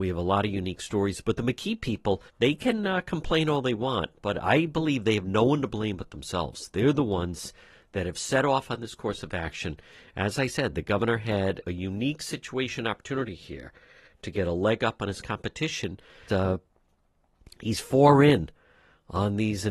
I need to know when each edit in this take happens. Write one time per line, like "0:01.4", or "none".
0:02.3
0:16.3